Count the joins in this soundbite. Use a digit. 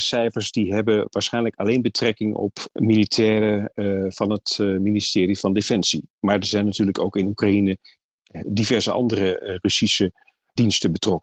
0